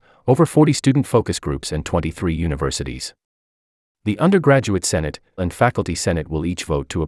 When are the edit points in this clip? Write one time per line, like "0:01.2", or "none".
0:05.4